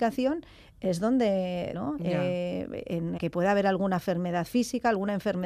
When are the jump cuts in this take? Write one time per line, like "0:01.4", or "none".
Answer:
0:01.7
0:03.2

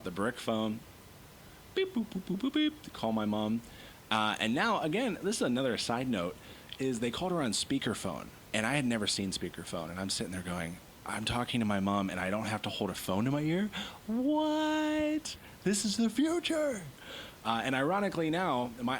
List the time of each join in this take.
none

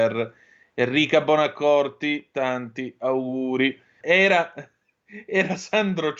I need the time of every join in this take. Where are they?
0:04.0

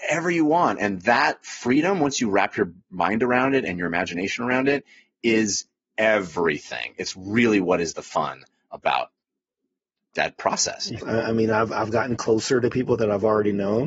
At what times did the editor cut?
0:11.0

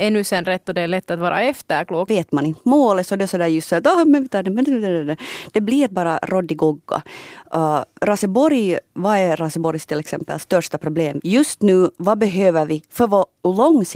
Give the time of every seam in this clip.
0:02.1
0:11.2

